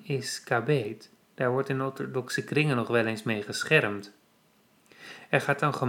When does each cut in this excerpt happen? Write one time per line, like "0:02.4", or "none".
0:01.3